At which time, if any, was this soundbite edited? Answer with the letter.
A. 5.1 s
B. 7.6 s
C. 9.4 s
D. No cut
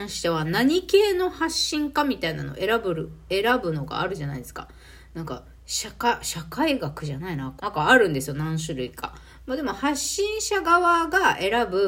B